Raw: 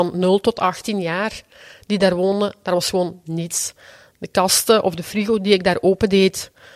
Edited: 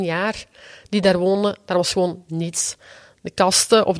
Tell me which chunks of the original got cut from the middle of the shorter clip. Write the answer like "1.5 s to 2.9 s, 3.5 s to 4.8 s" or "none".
none

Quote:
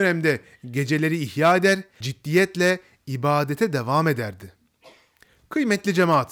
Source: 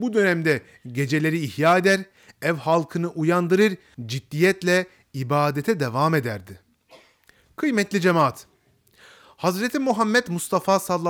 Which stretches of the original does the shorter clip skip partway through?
2.2 s to 4.1 s

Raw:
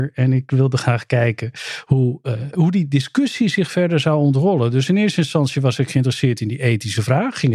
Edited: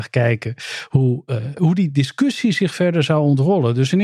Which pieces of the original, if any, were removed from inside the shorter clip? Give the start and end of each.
none

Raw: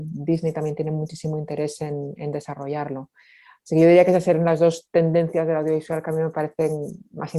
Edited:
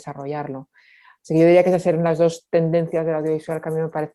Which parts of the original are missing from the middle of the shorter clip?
none

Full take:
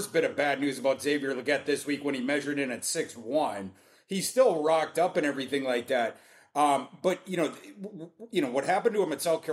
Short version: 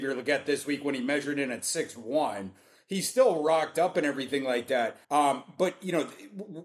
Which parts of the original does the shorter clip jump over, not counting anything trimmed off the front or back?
6.2 s to 6.5 s

